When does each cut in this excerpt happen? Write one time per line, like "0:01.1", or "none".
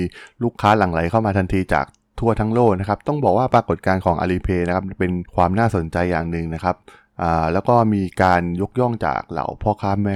none